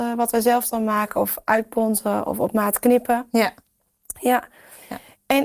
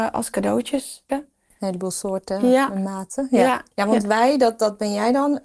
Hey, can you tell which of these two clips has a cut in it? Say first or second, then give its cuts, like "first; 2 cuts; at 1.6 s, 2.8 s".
second; 2 cuts; at 1.1 s, 3.7 s